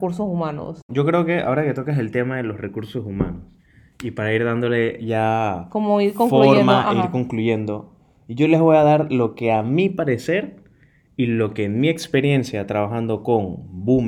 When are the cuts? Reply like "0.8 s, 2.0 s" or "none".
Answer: none